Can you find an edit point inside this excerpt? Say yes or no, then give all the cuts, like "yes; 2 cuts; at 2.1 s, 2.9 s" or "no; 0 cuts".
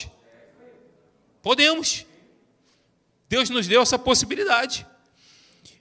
no; 0 cuts